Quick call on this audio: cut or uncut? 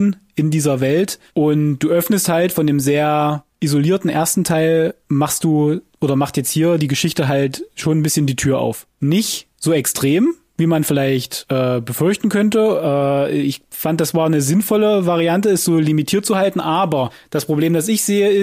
uncut